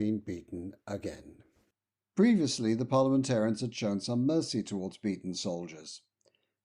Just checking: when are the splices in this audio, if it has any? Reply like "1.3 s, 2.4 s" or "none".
none